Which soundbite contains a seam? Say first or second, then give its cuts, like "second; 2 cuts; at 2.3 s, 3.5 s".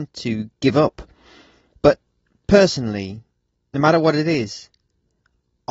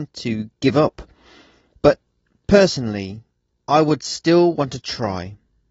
second; 1 cut; at 3.5 s